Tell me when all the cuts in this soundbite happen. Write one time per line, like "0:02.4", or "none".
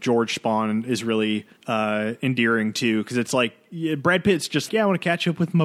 0:01.6
0:04.7

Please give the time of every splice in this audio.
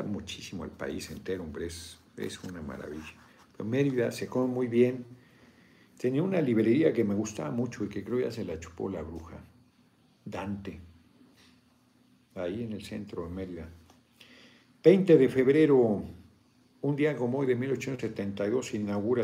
none

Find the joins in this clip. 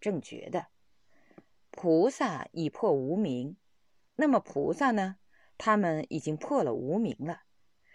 none

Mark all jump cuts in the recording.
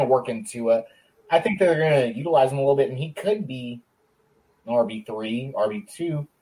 0:04.5

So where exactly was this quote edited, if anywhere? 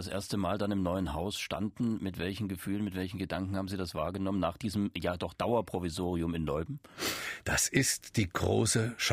none

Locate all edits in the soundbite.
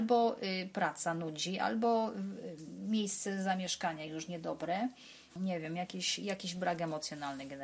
0:05.3

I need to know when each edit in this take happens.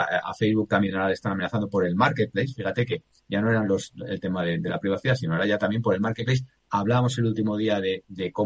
none

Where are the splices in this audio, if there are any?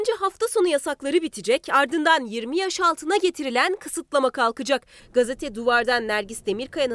0:05.0

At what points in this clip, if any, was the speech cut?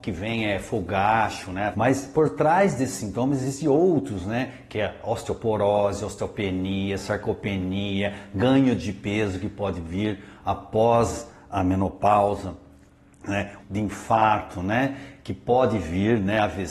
0:01.7
0:13.6

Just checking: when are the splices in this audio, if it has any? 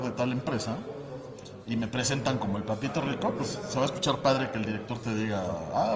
none

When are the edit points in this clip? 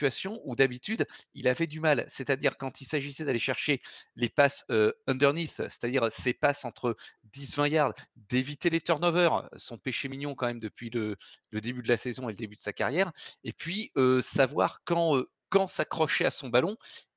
none

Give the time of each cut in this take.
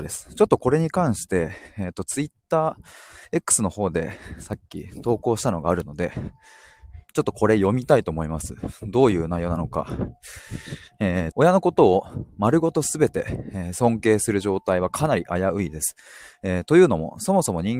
0:07.1
0:11.3

